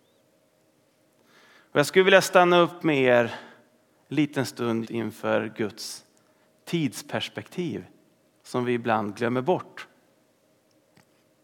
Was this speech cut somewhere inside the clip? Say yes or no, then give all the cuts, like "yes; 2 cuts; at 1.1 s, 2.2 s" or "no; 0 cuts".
yes; 1 cut; at 4.8 s